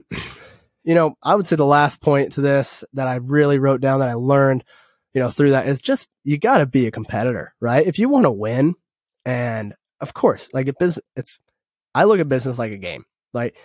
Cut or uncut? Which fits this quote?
uncut